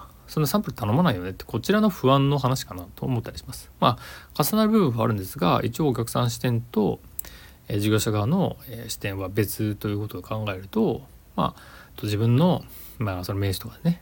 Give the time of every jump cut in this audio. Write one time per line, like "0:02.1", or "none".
0:11.9